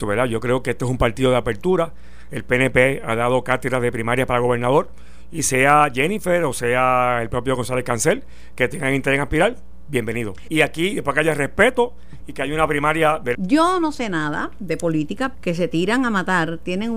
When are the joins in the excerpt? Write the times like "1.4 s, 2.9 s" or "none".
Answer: 10.5 s, 13.3 s, 15.3 s